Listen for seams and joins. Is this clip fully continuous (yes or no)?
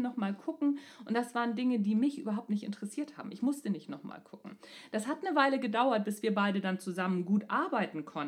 yes